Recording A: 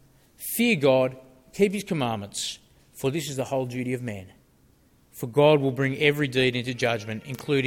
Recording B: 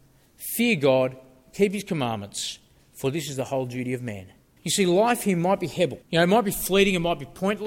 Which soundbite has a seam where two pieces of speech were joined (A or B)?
B